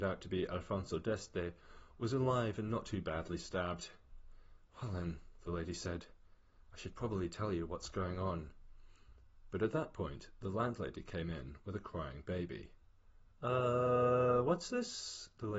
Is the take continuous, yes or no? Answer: yes